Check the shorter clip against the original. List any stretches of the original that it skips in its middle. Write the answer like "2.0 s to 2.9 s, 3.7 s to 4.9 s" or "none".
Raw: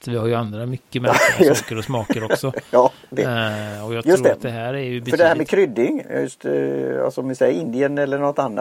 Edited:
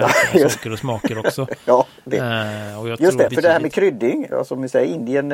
4.3 s to 5.0 s, 6.1 s to 7.0 s

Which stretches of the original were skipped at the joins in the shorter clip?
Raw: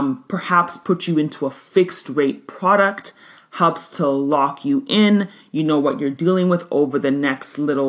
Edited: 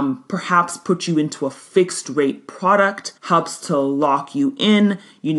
3.2 s to 3.5 s

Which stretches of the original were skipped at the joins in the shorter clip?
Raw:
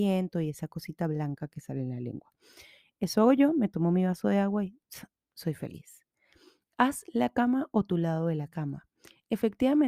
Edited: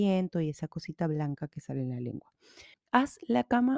2.7 s to 6.6 s

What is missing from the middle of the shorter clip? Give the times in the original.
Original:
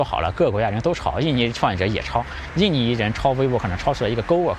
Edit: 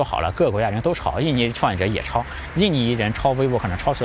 none

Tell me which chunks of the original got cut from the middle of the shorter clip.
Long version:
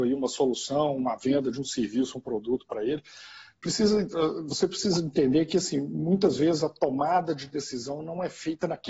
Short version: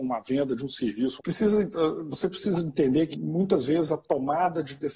2.1 s to 3.6 s, 5.5 s to 5.8 s

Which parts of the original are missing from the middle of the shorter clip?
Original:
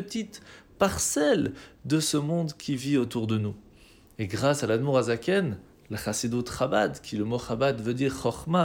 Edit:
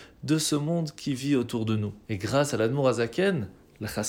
3.6 s to 4.1 s

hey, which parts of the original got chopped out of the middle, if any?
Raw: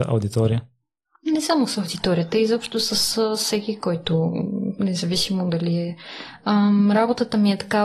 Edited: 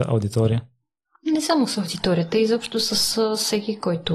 none

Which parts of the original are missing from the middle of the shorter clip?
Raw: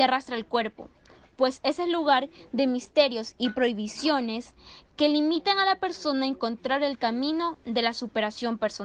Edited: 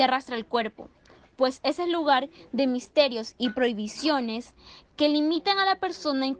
none

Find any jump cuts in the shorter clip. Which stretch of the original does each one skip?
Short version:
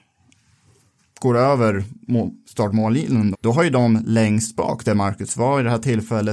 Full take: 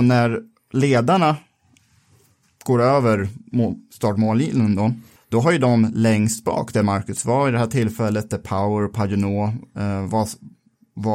4.8 s to 5.2 s

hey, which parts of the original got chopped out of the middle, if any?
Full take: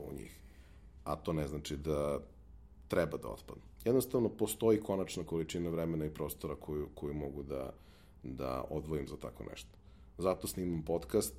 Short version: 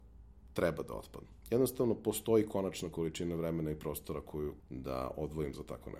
6.9 s to 8.1 s

